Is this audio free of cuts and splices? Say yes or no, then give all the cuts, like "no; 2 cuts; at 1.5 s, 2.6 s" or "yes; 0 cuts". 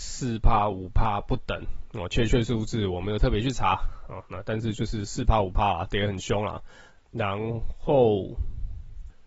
no; 1 cut; at 7.0 s